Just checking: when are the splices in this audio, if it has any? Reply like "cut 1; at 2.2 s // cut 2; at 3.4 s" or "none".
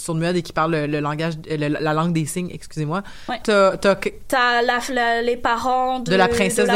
cut 1; at 3.4 s